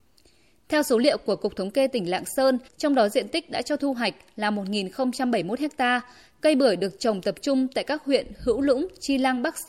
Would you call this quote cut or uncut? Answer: cut